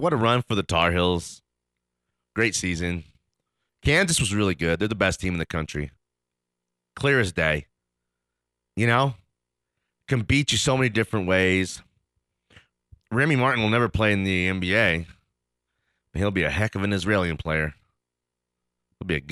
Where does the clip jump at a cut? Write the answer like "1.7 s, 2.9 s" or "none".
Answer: none